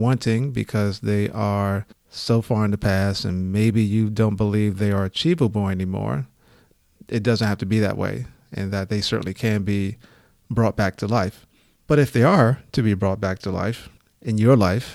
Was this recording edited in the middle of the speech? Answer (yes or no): no